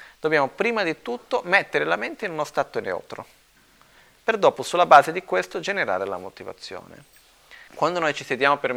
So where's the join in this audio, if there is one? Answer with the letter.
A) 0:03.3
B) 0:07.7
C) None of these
B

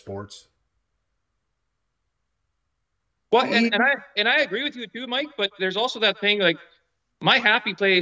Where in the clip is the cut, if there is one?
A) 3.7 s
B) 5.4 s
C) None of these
A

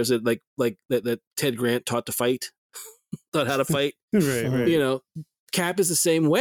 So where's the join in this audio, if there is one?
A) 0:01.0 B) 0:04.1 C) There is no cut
C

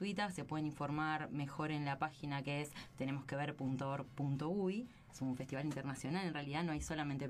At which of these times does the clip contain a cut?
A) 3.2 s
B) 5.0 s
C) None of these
C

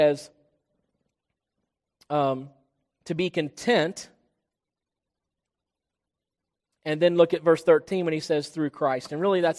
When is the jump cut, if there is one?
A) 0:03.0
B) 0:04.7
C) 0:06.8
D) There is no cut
D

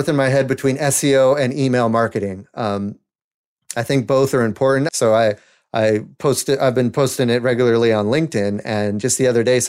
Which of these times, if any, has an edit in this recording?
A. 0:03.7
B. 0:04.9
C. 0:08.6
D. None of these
B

